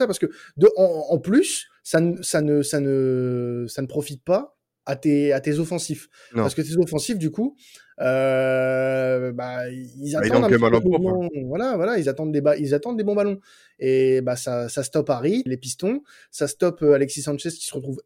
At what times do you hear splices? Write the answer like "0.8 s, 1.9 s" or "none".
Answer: 15.5 s

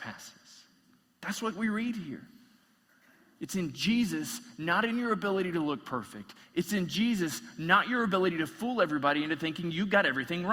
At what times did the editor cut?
none

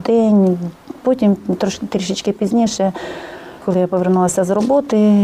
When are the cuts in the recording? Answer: 1.0 s

